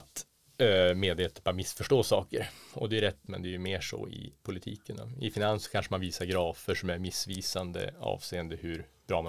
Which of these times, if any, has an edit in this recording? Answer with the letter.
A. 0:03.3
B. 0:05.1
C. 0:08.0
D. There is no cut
A